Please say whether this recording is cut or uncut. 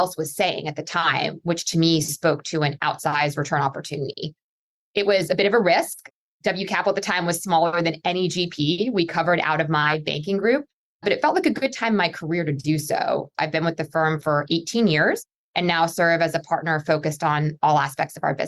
cut